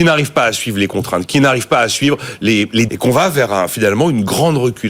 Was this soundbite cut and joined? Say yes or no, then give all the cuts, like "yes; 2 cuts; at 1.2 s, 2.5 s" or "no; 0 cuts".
yes; 2 cuts; at 1.3 s, 2.9 s